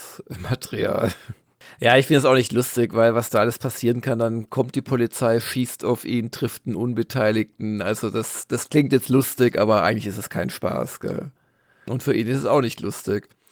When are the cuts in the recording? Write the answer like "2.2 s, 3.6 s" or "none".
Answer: none